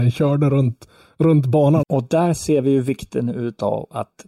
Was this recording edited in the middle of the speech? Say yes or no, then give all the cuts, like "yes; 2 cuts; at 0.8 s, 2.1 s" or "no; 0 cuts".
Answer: yes; 1 cut; at 1.8 s